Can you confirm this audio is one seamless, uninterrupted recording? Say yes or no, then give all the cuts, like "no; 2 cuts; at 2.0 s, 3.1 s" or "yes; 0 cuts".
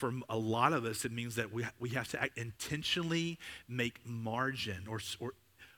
yes; 0 cuts